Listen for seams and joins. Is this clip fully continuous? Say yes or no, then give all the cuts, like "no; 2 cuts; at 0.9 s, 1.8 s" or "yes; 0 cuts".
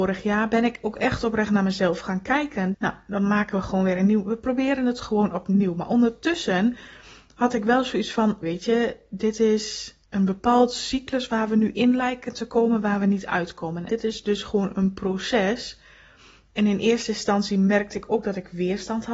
no; 3 cuts; at 2.7 s, 8.4 s, 13.9 s